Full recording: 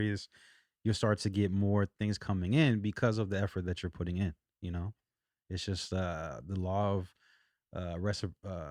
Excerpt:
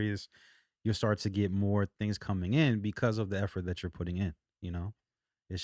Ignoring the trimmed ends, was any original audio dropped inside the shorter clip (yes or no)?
no